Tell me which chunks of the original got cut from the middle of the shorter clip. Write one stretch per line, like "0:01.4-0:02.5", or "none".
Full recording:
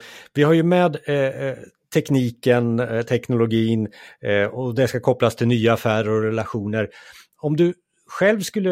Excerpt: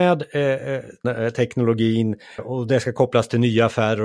0:01.8-0:02.8
0:04.1-0:04.5